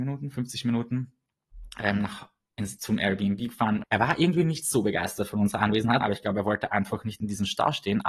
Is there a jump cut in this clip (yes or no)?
yes